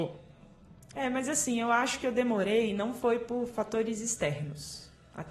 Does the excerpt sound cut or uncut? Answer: cut